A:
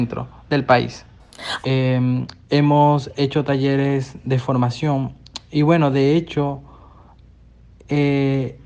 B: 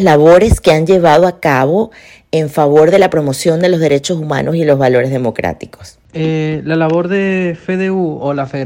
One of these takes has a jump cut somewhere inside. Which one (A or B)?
A